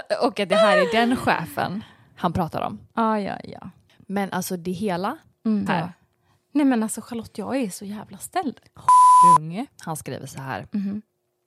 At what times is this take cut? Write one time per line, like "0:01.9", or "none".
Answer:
0:05.7
0:09.7